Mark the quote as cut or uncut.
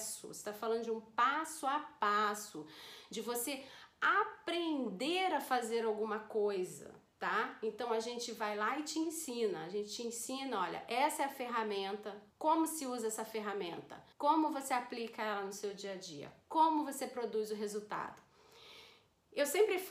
cut